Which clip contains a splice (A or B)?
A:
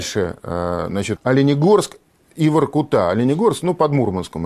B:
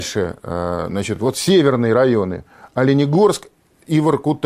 A